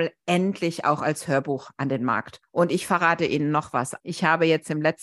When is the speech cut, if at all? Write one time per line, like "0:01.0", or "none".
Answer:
0:04.0